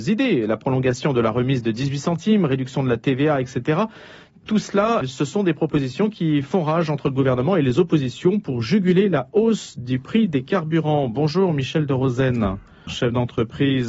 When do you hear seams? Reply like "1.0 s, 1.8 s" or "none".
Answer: 5.0 s, 12.9 s